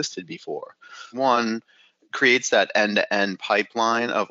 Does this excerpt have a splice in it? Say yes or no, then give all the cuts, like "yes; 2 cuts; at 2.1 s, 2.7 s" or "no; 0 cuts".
yes; 1 cut; at 1.1 s